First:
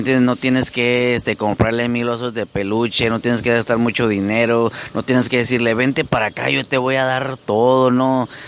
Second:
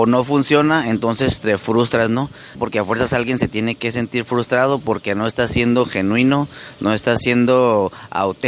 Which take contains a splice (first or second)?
second